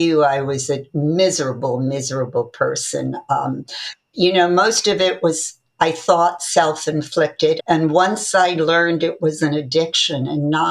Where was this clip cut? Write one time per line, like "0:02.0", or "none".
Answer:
0:04.1
0:07.6